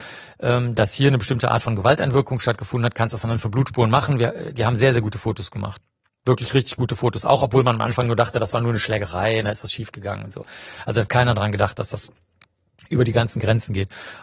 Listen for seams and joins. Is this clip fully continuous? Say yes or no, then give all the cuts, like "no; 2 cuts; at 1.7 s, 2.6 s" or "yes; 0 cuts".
yes; 0 cuts